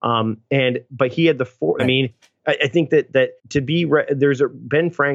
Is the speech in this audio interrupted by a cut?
yes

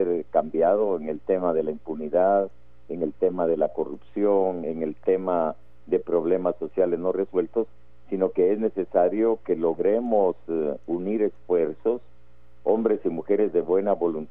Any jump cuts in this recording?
no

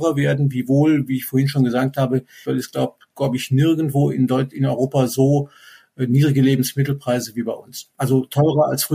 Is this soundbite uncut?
no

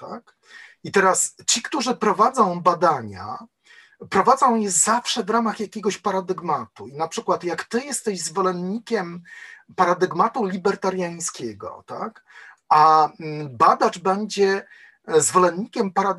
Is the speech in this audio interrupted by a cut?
no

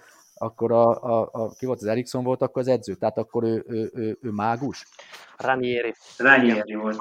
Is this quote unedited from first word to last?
yes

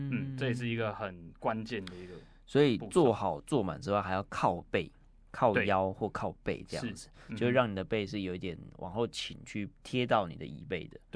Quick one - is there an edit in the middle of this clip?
yes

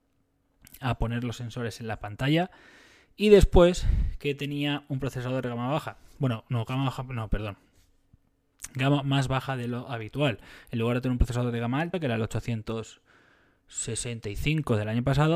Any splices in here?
no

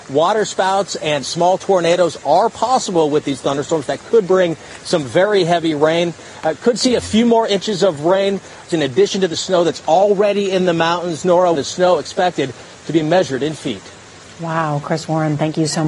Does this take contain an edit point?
yes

